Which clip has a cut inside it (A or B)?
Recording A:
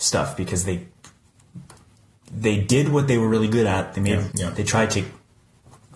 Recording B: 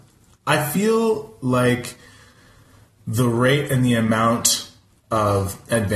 A